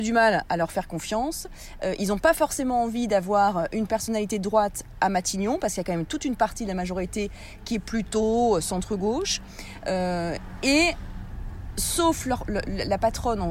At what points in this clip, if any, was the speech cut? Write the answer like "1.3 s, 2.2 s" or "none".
none